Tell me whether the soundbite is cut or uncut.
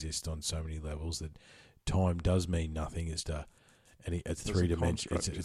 cut